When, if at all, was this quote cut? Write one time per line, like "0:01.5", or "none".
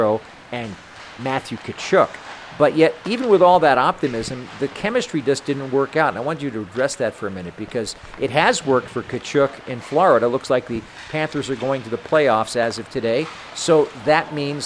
none